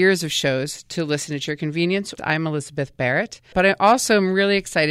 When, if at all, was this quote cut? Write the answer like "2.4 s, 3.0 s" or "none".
2.2 s, 3.5 s